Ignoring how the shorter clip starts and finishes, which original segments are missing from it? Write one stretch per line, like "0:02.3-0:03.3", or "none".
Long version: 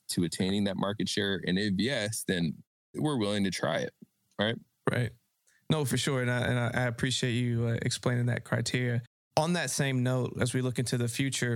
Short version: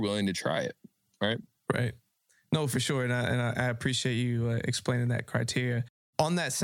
none